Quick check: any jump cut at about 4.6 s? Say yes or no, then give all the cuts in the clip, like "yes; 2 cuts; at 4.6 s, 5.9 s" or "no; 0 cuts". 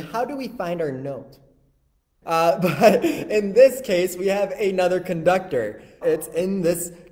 no; 2 cuts; at 2.2 s, 6.0 s